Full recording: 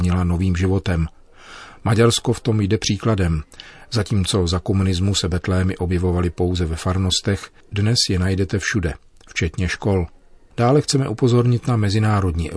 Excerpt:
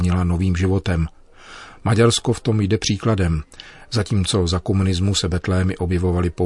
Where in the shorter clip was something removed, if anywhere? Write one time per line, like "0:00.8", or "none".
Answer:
none